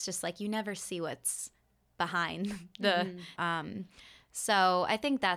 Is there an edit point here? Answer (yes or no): yes